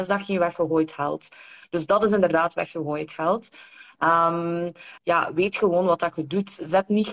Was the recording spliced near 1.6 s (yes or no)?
yes